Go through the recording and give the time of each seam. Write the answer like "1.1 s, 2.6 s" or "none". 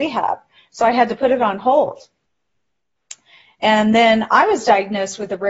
3.6 s